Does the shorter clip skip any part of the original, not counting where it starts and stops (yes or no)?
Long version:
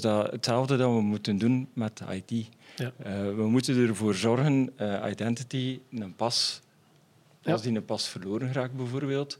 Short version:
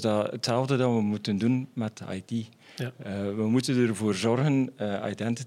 no